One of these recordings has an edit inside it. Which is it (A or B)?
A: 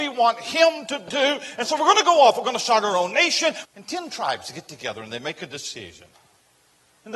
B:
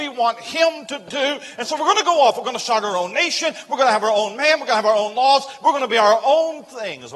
A